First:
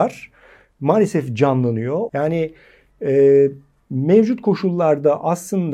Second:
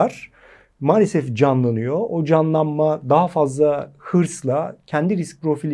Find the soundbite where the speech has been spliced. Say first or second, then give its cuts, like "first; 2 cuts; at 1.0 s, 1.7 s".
first; 1 cut; at 2.1 s